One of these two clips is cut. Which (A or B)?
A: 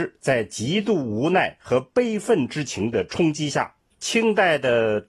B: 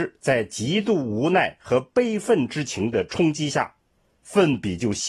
A